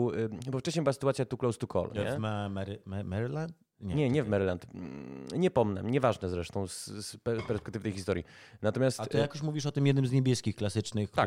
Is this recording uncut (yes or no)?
yes